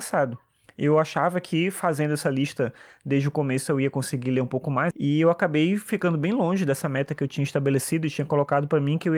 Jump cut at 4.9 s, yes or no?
yes